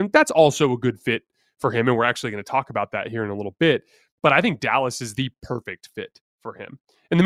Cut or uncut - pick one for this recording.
uncut